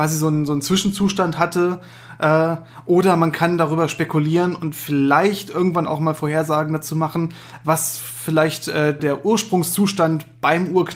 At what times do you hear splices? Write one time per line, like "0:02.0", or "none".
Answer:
0:09.0